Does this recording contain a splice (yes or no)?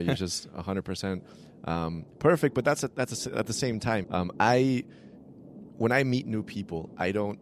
yes